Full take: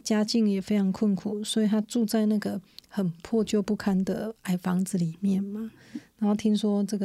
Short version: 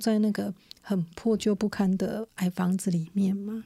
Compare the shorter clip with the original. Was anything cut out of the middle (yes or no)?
no